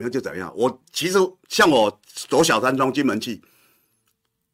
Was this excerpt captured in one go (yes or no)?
yes